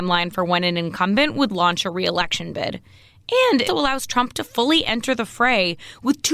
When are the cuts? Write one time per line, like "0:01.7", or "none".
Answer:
0:03.7